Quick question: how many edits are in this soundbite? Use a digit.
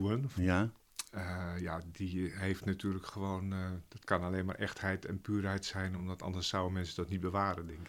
0